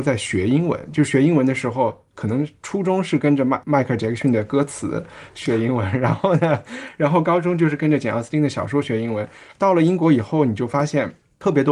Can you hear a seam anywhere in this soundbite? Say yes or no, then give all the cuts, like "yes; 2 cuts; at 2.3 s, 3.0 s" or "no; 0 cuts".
no; 0 cuts